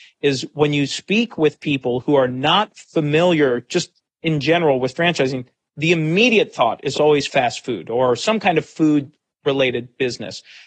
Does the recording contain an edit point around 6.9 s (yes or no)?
no